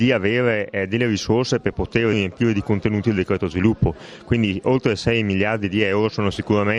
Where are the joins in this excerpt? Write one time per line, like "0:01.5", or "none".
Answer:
0:02.1